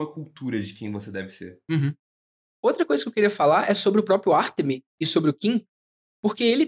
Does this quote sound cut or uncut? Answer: uncut